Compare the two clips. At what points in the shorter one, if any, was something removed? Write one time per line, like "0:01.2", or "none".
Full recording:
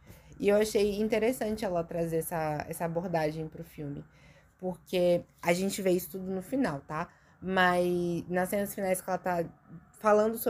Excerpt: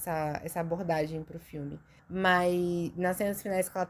0:02.0